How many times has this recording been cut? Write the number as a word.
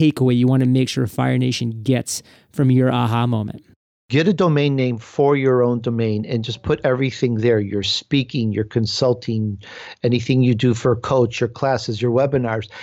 zero